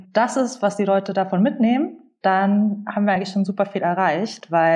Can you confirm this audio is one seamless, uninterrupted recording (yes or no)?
yes